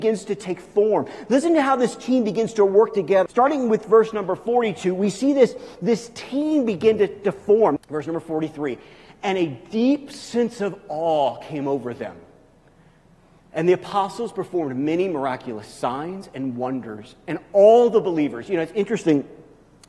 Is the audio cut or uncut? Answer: cut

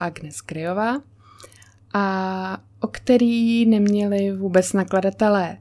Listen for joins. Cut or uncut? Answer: cut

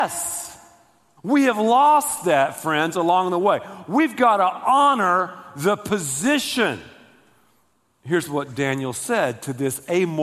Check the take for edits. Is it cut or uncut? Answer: cut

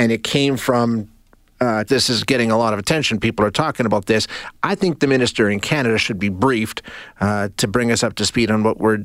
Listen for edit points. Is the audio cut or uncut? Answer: cut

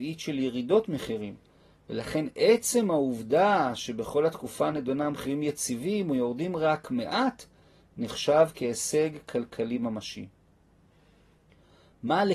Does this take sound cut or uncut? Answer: uncut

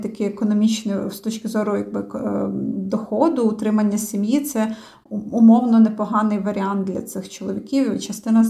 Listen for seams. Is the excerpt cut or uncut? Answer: uncut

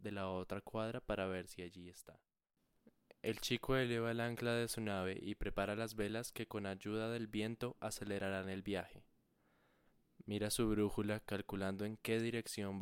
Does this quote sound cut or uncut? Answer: uncut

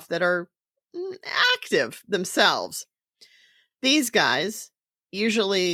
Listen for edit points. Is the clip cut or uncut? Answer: uncut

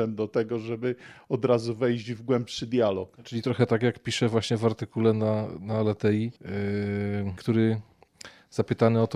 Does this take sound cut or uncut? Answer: cut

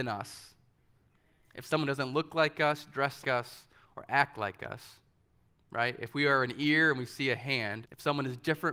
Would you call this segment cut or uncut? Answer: cut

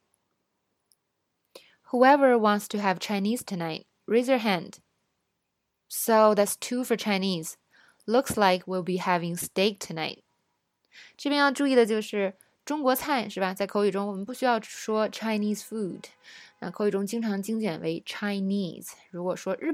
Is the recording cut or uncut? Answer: uncut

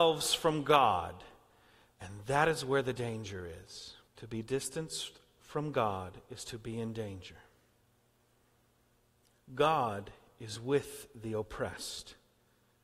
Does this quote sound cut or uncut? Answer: cut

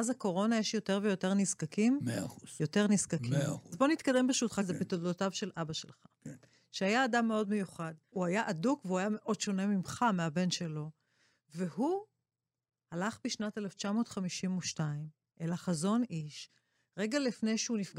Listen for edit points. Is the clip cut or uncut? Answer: uncut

